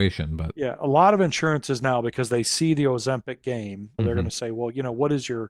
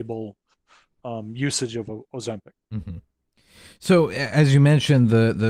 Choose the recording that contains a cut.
first; 1 cut; at 4.0 s

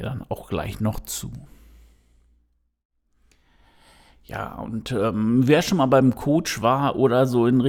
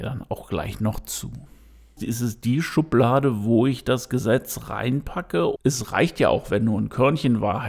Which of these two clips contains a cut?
second; 2 cuts; at 2.0 s, 5.6 s

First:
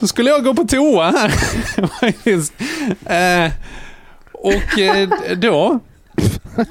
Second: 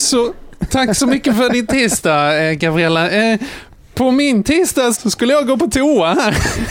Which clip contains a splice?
second; 1 cut; at 4.9 s

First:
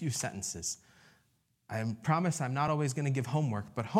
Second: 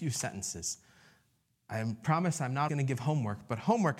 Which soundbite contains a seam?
second; 1 cut; at 2.7 s

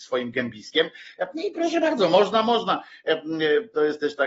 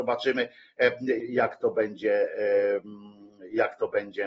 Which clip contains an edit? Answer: second; 1 cut; at 1.2 s

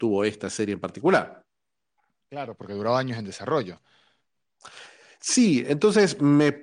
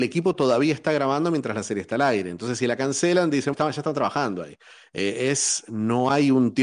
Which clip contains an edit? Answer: second; 1 cut; at 3.5 s

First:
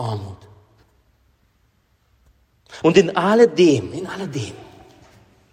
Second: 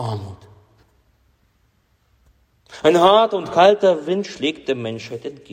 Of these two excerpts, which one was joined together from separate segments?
first; 1 cut; at 2.8 s

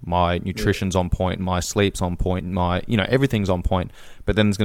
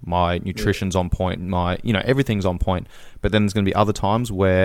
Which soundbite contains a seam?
second; 1 cut; at 1.4 s

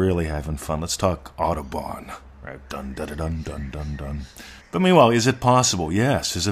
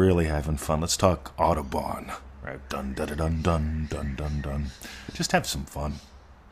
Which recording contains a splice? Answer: first; 2 cuts; at 3.4 s, 4.6 s

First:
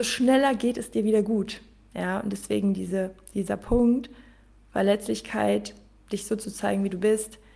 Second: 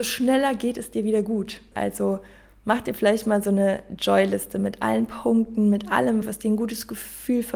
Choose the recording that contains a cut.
second; 2 cuts; at 1.7 s, 6.2 s

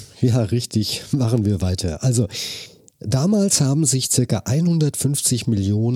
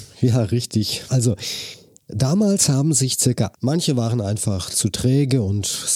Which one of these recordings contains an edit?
second; 2 cuts; at 1.1 s, 3.5 s

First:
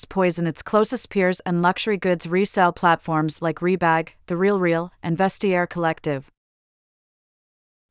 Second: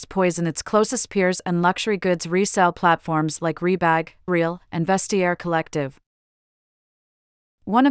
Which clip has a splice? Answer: second; 1 cut; at 4.3 s

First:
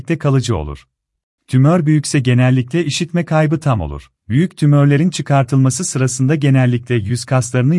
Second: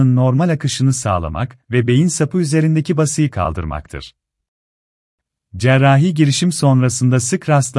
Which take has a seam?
first; 2 cuts; at 1.4 s, 4.2 s

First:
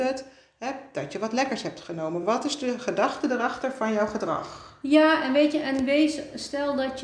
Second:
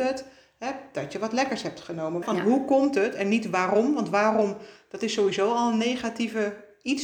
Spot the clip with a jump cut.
second; 1 cut; at 2.2 s

